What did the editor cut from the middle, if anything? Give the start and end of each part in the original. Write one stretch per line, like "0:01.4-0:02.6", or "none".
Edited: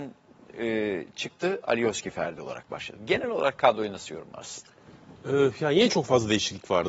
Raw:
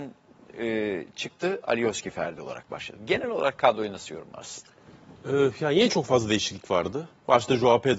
none